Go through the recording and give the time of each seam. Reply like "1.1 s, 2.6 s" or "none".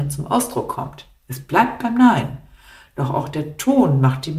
1.2 s